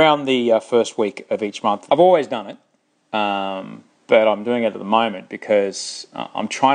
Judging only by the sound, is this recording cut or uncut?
cut